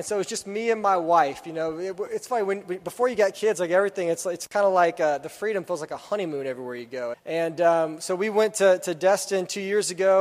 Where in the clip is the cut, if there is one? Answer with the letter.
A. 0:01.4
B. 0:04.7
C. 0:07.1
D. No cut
C